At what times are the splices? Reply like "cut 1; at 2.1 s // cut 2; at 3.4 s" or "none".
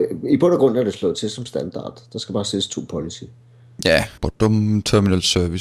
cut 1; at 4.2 s